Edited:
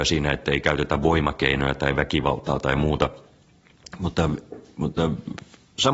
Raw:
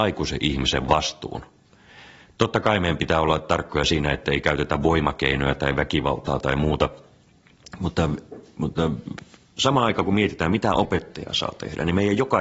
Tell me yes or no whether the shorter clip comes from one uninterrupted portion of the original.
yes